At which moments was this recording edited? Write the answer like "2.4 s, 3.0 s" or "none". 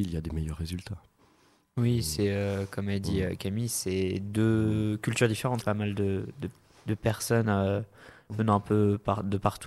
5.6 s